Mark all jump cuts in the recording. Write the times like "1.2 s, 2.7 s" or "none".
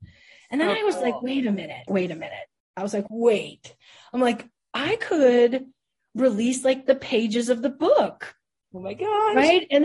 1.9 s, 3.1 s